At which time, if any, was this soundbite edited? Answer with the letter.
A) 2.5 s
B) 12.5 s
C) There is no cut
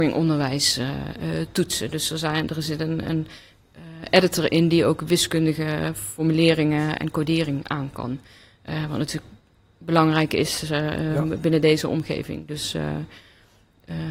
C